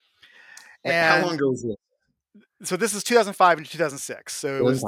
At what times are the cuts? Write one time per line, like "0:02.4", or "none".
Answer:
none